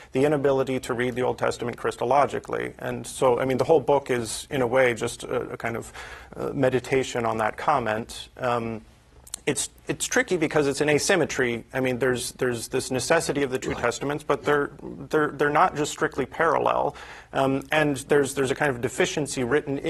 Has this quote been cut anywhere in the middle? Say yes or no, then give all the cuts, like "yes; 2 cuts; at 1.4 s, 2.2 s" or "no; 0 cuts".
no; 0 cuts